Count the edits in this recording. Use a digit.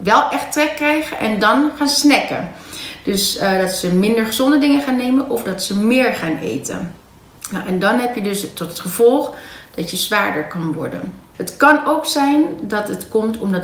1